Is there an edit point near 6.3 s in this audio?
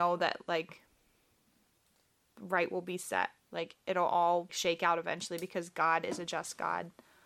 no; 2 cuts; at 3.4 s, 4.5 s

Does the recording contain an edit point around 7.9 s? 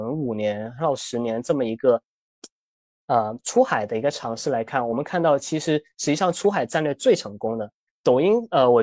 yes; 1 cut; at 7.9 s

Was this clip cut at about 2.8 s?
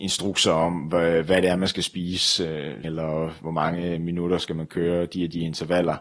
yes; 1 cut; at 2.8 s

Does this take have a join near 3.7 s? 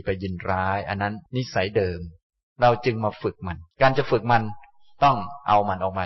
yes; 2 cuts; at 1.3 s, 3.7 s

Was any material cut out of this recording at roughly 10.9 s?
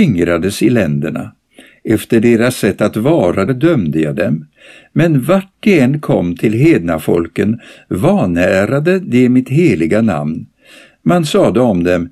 no; 1 cut; at 3.5 s

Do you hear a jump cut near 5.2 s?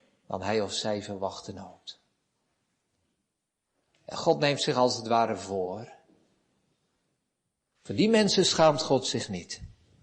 no; 2 cuts; at 3.9 s, 7.7 s

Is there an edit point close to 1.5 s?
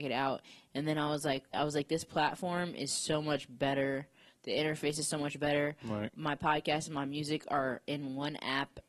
yes; 1 cut; at 1.5 s

